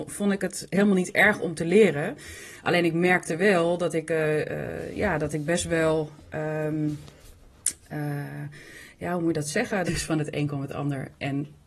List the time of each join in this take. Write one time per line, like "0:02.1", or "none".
0:09.9